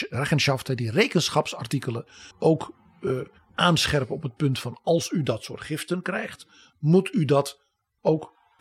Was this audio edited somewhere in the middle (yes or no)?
yes